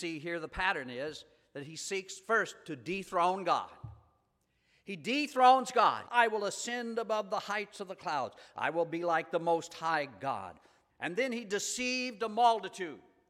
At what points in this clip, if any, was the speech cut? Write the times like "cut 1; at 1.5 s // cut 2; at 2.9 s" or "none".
cut 1; at 6.1 s // cut 2; at 10.9 s

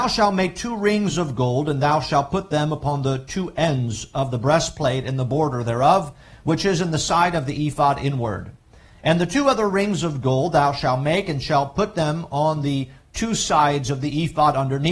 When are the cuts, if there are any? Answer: none

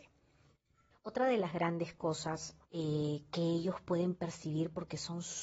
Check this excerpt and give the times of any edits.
cut 1; at 0.9 s // cut 2; at 2.6 s

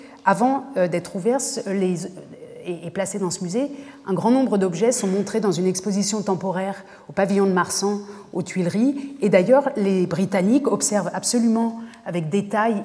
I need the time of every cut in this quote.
none

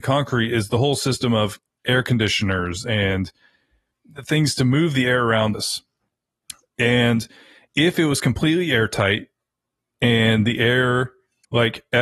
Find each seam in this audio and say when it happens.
cut 1; at 5.5 s

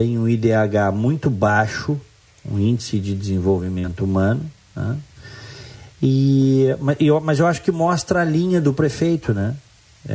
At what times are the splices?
none

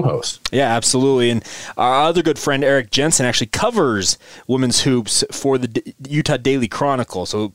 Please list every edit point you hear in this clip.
none

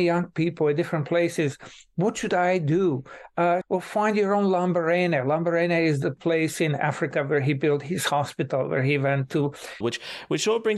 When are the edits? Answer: cut 1; at 3.6 s // cut 2; at 9.8 s

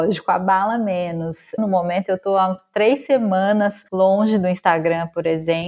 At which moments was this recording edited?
cut 1; at 1.6 s // cut 2; at 3.9 s

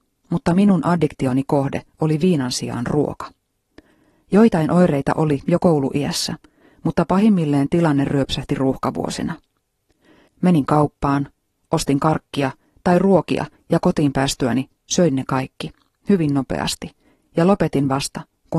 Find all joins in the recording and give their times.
cut 1; at 10.3 s // cut 2; at 13.6 s

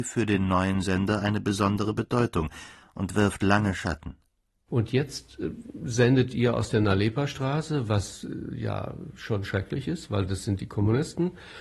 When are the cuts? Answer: cut 1; at 4.7 s

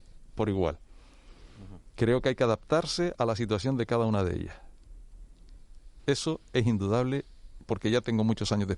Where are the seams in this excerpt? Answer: cut 1; at 6.0 s

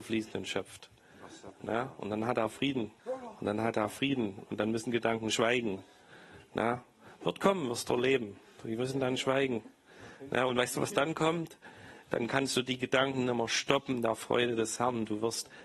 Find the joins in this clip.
cut 1; at 3.0 s

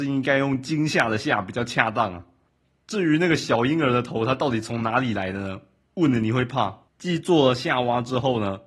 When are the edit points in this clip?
cut 1; at 6.9 s

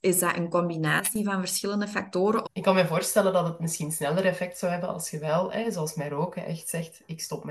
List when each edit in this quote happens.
cut 1; at 2.4 s

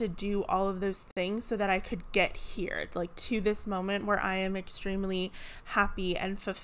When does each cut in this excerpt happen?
none

